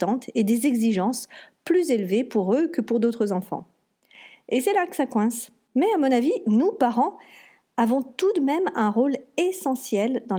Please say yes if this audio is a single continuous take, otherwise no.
yes